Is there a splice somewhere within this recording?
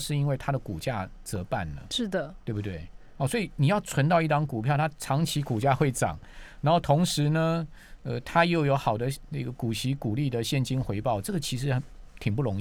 no; 0 cuts

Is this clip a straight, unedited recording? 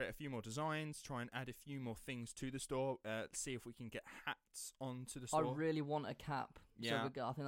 yes; 0 cuts

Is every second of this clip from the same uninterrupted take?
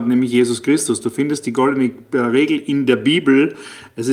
yes; 0 cuts

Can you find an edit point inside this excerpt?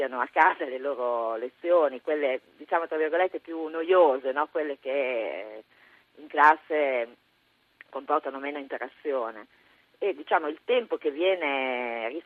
no; 0 cuts

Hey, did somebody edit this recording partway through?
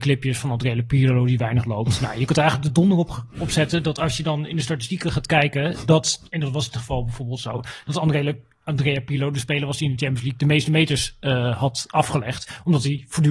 no; 0 cuts

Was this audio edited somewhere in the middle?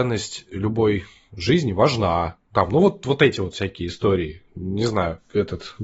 no; 0 cuts

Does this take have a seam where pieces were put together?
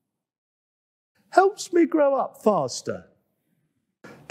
yes; 1 cut; at 1.1 s

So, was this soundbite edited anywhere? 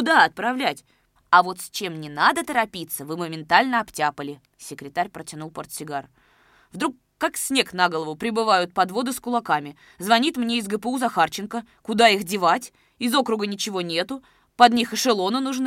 yes; 2 cuts; at 1.2 s, 4.5 s

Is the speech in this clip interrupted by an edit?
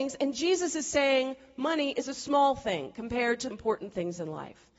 yes; 1 cut; at 3.5 s

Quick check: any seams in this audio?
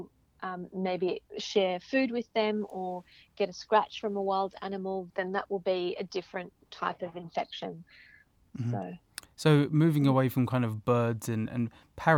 yes; 1 cut; at 5.1 s

